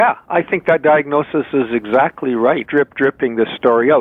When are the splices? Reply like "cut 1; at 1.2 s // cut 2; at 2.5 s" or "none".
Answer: cut 1; at 2.6 s